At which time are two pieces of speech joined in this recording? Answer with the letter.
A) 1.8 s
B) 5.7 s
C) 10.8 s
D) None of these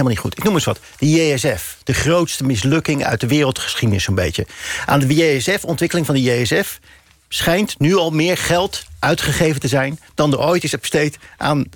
A